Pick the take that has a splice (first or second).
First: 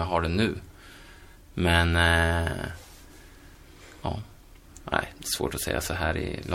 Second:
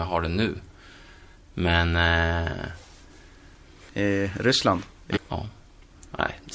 second